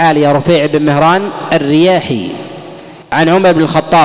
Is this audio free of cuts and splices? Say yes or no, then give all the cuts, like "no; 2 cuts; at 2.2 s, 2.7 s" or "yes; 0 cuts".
no; 1 cut; at 3.0 s